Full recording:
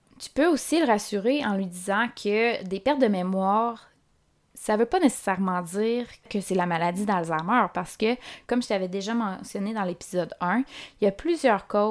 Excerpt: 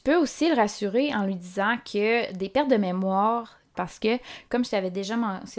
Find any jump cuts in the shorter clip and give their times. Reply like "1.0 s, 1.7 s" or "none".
3.7 s